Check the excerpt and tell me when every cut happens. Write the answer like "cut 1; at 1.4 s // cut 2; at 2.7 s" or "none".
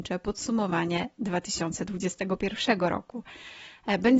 none